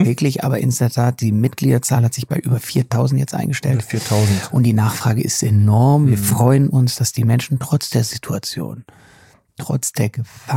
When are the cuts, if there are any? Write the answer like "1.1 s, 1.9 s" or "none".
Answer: none